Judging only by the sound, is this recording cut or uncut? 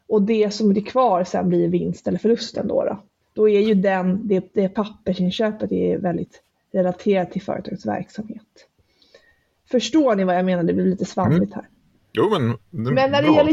cut